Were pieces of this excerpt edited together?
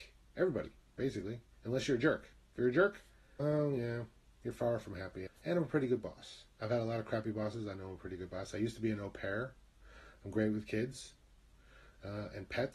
yes; 2 cuts; at 3.4 s, 5.3 s

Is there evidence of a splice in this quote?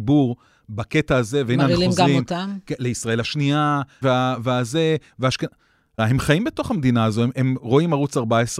yes; 2 cuts; at 4.0 s, 6.0 s

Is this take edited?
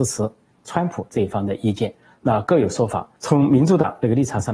yes; 1 cut; at 3.2 s

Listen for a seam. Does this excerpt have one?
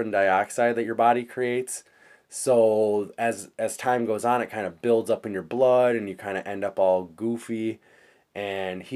no; 0 cuts

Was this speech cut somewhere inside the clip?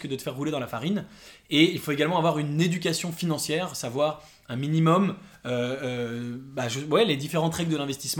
no; 0 cuts

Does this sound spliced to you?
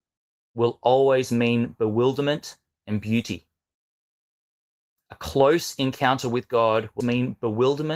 yes; 1 cut; at 7.0 s

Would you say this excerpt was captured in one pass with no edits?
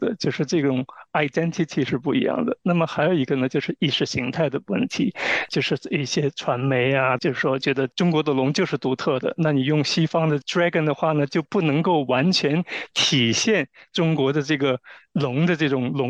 no; 1 cut; at 7.2 s

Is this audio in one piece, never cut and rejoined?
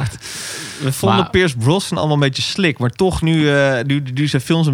yes; 0 cuts

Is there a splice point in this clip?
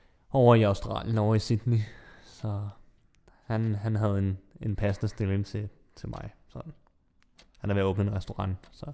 no; 0 cuts

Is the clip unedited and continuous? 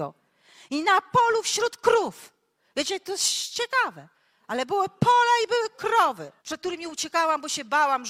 no; 1 cut; at 6.4 s

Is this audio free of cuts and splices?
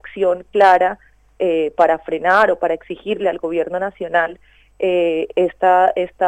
yes; 0 cuts

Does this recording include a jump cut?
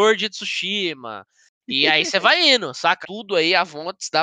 yes; 1 cut; at 3.0 s

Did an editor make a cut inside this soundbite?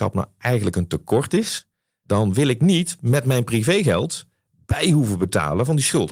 no; 0 cuts

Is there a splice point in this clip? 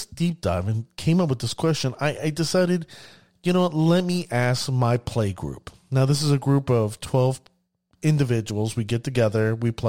no; 0 cuts

